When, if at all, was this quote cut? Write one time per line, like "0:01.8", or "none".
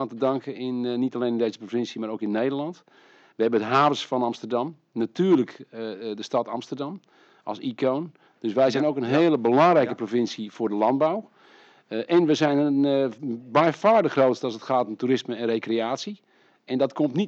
0:08.3

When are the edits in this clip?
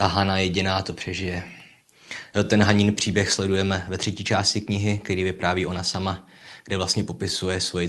none

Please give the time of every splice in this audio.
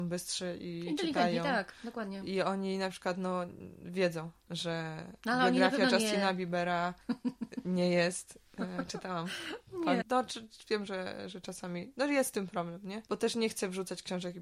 0:10.0

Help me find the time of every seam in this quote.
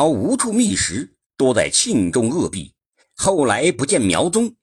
0:03.0

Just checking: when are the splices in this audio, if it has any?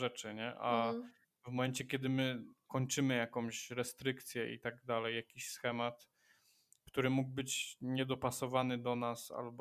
none

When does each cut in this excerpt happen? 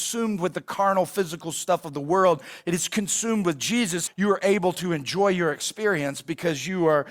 0:04.1

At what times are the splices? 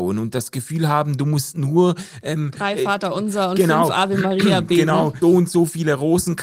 0:05.2

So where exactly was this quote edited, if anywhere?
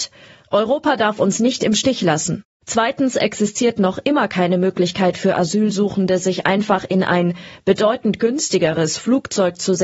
0:02.6

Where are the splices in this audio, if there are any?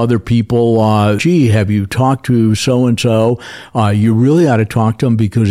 0:01.2

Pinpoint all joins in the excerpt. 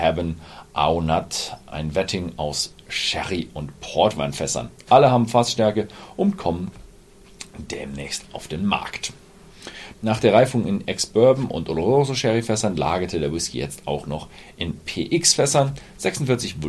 0:09.9

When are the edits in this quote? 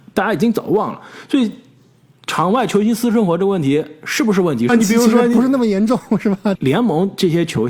0:04.7
0:06.6

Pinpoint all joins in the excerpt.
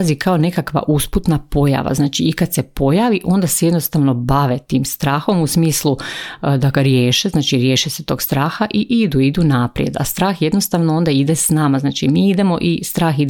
none

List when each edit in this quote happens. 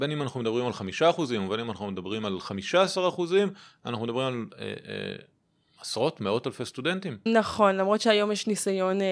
0:07.3

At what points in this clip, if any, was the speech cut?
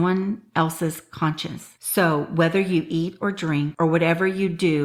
0:01.8

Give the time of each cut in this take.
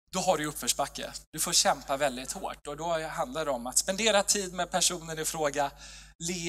none

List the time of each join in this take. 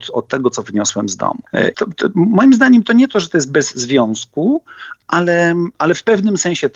0:01.7

